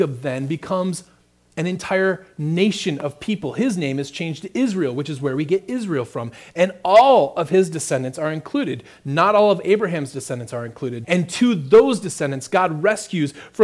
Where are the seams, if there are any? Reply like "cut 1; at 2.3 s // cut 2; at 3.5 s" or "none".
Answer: cut 1; at 11.0 s